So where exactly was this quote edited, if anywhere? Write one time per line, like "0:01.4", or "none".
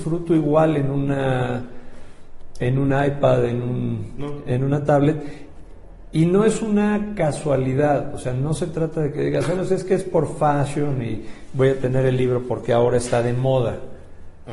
0:09.6